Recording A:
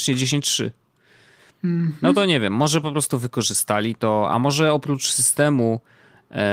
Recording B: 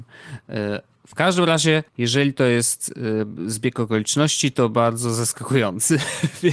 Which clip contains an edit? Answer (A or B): B